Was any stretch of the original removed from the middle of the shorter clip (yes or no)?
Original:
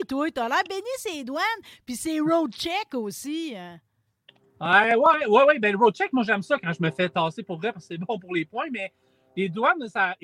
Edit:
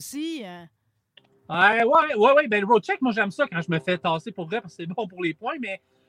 no